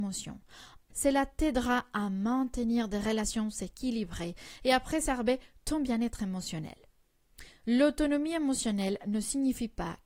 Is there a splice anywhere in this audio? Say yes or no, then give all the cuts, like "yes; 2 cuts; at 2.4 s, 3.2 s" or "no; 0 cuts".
yes; 1 cut; at 0.9 s